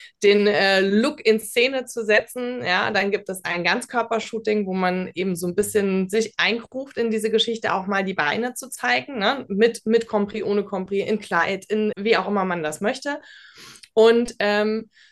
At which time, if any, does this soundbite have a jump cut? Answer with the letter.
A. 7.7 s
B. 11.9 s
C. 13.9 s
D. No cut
B